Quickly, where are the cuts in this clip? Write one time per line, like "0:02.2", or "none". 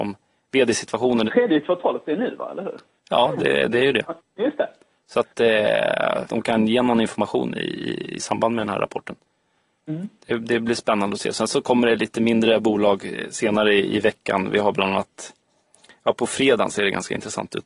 0:01.3
0:06.3